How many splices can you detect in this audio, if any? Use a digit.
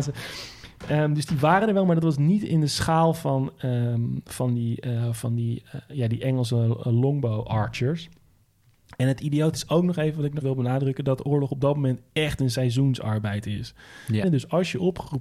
2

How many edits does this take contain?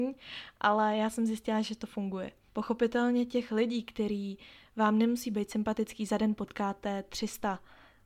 1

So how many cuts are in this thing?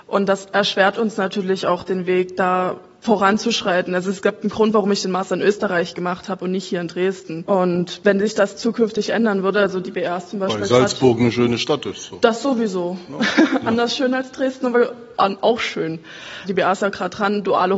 0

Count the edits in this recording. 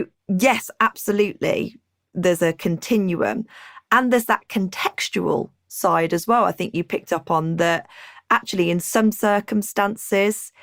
0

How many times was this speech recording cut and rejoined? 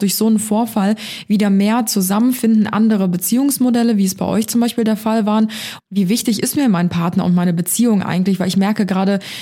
1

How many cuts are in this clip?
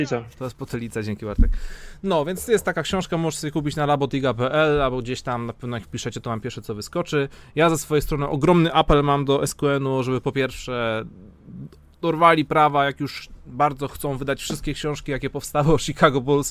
0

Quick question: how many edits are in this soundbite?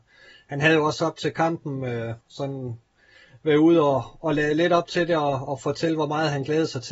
1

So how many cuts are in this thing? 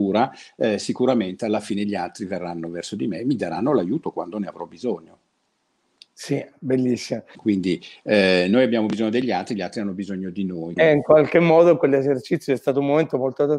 2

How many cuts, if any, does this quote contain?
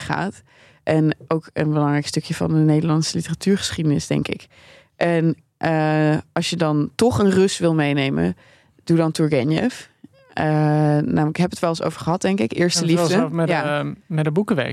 0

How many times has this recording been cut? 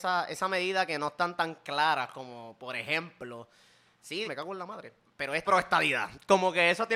2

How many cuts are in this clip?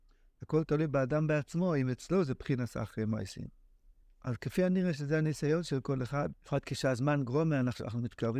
2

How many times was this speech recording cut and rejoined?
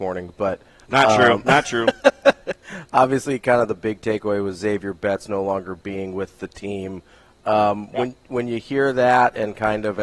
0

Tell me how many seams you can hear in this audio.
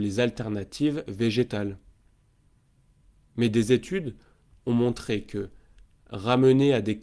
0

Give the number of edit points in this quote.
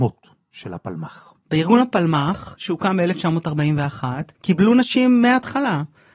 2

